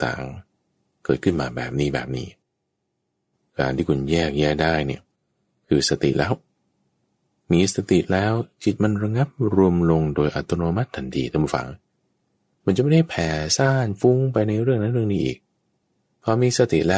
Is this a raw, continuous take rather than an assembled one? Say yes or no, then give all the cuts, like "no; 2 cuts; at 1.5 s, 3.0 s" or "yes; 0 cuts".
yes; 0 cuts